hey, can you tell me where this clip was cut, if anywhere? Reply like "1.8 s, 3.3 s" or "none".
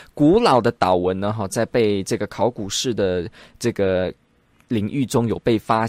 none